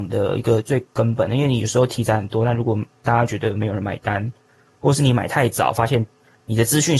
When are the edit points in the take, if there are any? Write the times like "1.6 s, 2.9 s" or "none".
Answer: none